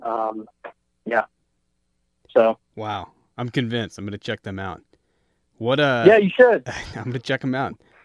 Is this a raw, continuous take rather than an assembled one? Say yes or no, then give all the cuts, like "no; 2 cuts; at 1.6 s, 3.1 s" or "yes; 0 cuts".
yes; 0 cuts